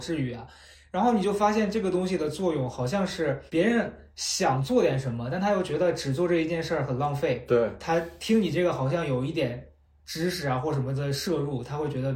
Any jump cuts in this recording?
yes; 1 cut; at 3.5 s

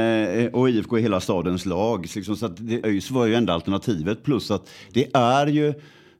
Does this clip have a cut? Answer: yes; 1 cut; at 2.8 s

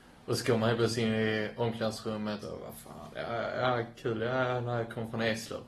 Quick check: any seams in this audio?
yes; 1 cut; at 2.4 s

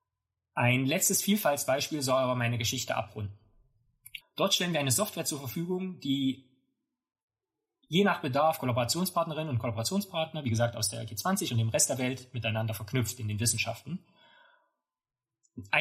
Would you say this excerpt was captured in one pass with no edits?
no; 1 cut; at 4.2 s

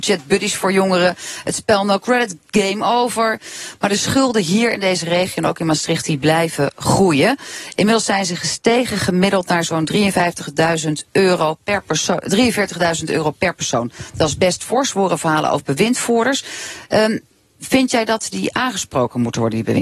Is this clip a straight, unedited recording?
yes; 0 cuts

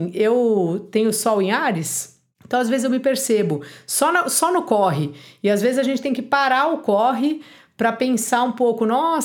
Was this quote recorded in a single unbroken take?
yes; 0 cuts

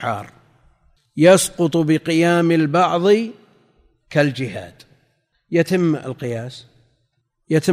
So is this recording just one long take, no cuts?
yes; 0 cuts

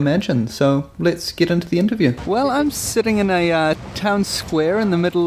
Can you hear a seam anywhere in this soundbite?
no; 0 cuts

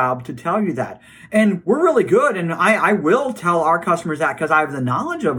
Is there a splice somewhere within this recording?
no; 0 cuts

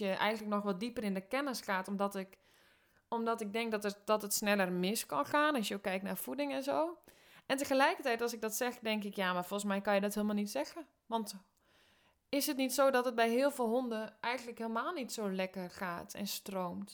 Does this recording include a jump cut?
no; 0 cuts

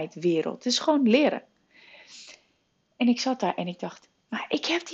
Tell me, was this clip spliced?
no; 0 cuts

